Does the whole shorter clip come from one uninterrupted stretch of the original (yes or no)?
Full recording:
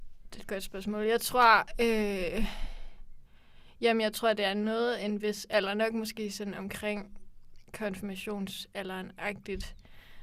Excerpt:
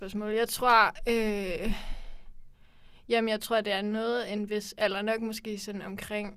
yes